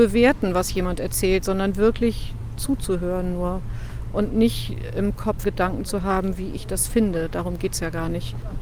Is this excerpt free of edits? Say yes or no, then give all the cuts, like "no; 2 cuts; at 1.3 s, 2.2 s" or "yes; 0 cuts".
no; 1 cut; at 5.4 s